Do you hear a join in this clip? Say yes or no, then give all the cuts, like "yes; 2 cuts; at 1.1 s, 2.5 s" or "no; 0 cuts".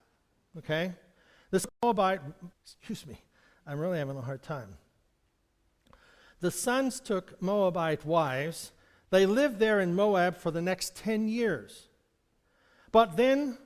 yes; 2 cuts; at 2.5 s, 9.0 s